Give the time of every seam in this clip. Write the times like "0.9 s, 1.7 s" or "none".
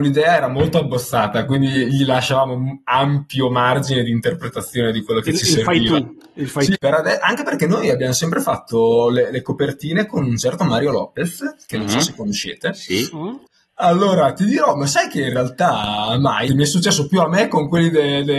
6.7 s, 13.5 s, 16.5 s